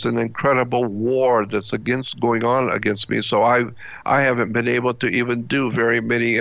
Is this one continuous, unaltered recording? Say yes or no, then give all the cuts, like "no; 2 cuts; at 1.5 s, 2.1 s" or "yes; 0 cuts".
yes; 0 cuts